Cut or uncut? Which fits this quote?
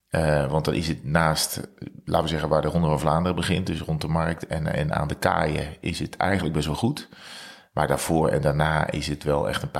uncut